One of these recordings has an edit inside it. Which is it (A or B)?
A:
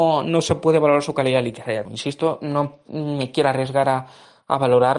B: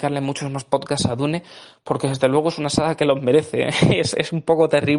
A